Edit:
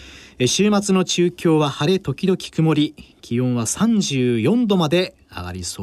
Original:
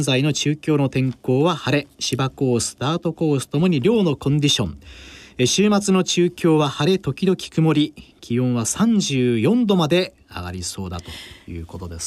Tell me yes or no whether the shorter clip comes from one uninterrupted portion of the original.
yes